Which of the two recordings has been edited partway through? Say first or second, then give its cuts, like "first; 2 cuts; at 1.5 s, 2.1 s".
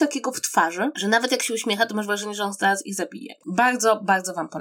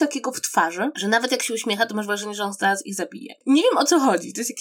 first; 1 cut; at 3.4 s